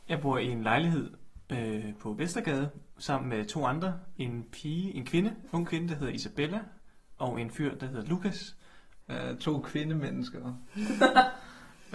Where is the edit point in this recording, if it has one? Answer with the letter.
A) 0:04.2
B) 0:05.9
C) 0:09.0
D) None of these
C